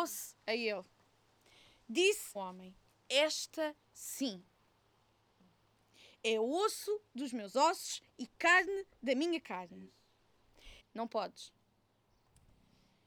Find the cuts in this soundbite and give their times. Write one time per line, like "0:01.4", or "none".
0:02.4
0:10.8

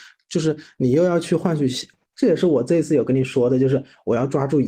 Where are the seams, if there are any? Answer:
0:02.1

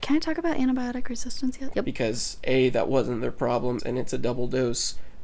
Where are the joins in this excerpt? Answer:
0:01.7
0:03.8

